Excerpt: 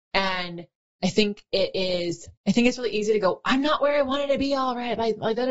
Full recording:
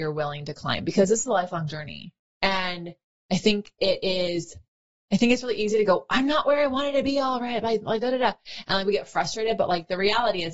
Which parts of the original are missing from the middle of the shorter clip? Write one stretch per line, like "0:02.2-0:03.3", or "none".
0:04.6-0:05.0